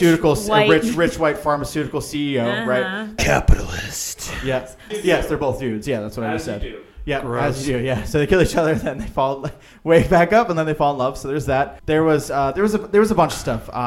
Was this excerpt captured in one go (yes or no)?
no